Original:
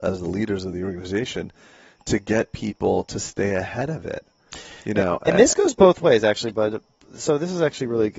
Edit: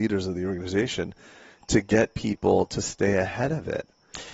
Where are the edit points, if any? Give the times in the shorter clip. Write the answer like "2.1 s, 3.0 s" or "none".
none